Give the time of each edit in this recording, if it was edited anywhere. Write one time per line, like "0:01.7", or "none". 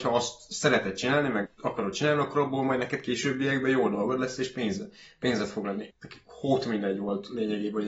0:05.9